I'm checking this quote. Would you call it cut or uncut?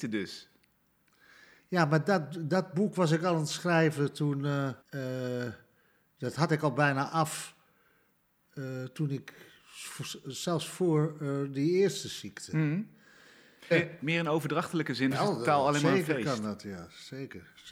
cut